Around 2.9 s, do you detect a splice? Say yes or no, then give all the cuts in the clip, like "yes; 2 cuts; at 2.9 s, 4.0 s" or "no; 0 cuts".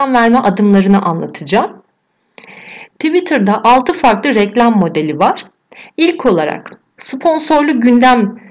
yes; 1 cut; at 2.9 s